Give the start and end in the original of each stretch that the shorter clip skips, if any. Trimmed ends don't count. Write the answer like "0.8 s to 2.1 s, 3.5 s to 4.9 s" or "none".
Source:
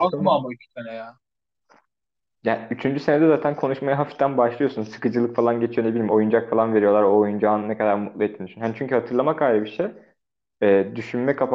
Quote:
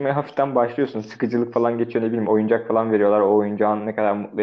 none